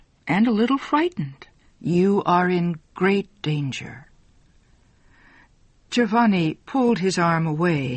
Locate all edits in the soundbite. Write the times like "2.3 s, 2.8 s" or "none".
1.7 s